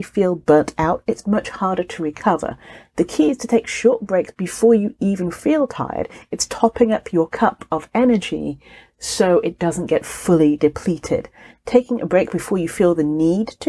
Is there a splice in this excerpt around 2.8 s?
no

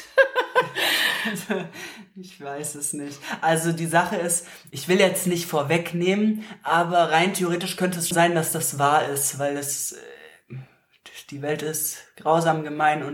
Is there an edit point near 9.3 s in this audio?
no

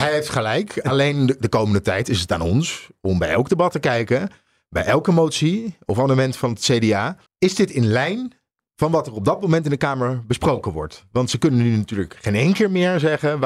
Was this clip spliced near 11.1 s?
no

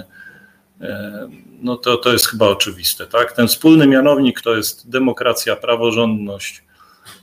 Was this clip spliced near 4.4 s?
yes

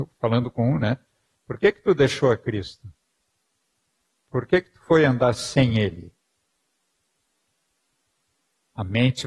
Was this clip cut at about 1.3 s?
yes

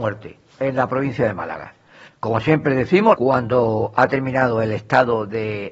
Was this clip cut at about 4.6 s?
no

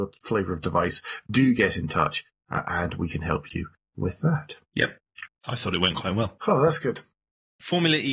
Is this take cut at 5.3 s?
yes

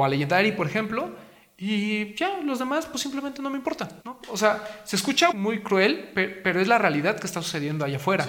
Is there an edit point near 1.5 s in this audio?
no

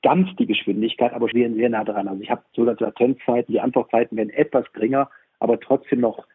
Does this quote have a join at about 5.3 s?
no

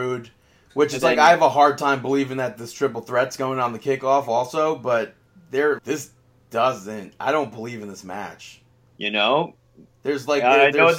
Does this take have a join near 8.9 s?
yes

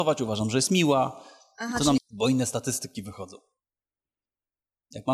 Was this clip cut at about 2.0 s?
yes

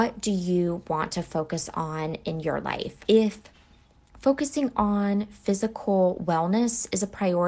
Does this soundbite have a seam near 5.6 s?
no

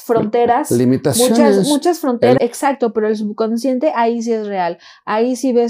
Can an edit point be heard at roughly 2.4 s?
yes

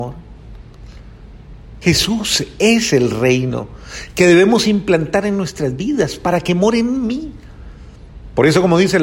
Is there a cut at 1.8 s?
no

